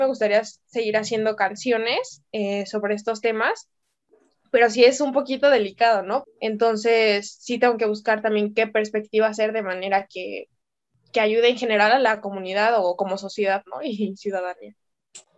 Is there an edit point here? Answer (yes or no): yes